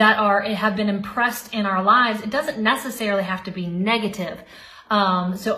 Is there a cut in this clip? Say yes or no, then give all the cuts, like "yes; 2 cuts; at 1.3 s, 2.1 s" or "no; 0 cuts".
no; 0 cuts